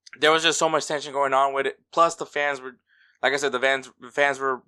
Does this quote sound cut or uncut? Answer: uncut